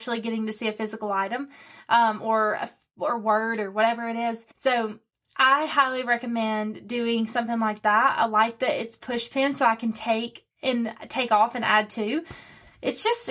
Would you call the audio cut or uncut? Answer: cut